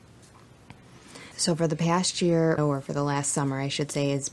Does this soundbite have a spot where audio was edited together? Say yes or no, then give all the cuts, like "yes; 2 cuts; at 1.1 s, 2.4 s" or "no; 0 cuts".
yes; 2 cuts; at 1.3 s, 2.6 s